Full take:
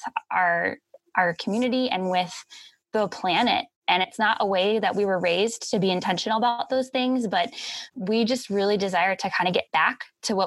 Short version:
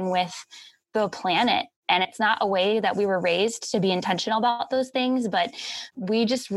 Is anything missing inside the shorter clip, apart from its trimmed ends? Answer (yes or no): no